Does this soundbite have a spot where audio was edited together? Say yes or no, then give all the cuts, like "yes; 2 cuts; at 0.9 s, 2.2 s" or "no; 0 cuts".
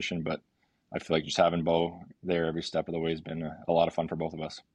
no; 0 cuts